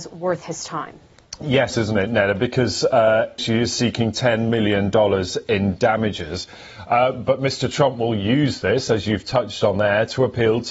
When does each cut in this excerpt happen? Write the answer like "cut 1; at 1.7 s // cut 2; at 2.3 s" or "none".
cut 1; at 1.7 s // cut 2; at 3.4 s